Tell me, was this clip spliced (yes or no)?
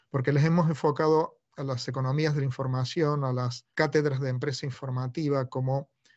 yes